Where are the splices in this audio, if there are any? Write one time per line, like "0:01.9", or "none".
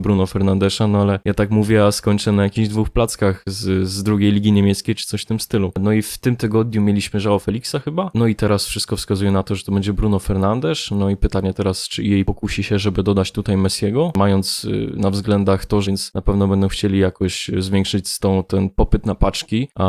0:05.7
0:15.8